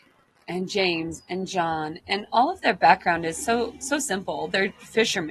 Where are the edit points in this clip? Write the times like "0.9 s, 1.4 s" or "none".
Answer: none